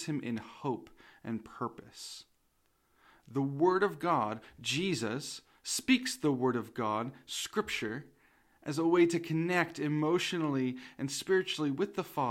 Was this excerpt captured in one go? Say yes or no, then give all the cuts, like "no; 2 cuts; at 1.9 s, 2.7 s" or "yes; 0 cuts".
yes; 0 cuts